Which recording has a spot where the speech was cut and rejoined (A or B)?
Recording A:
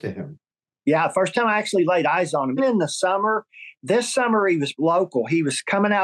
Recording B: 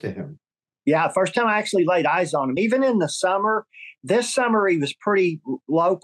A